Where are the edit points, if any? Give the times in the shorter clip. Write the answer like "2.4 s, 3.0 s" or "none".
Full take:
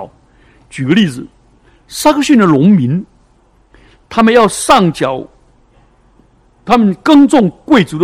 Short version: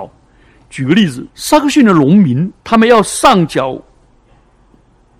1.3 s, 2.6 s